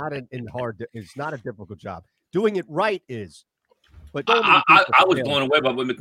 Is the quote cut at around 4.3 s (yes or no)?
yes